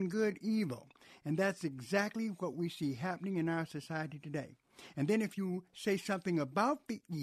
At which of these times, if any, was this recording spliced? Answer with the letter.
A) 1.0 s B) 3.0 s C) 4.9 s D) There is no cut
D